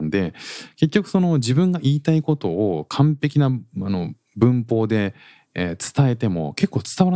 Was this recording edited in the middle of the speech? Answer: no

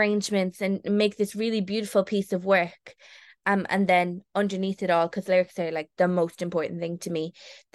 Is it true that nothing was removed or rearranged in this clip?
yes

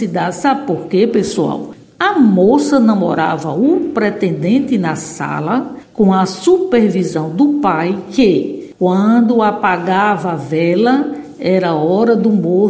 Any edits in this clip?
no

